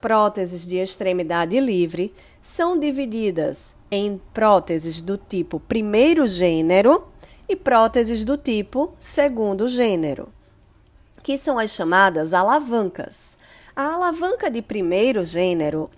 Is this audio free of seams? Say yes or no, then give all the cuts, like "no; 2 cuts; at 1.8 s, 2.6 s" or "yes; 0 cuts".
yes; 0 cuts